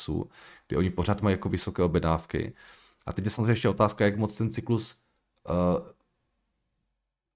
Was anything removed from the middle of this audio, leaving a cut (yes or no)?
no